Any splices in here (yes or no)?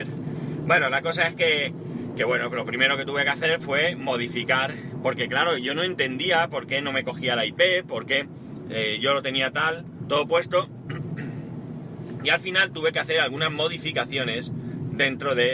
no